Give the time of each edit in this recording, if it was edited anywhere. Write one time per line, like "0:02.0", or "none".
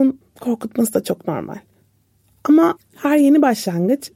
none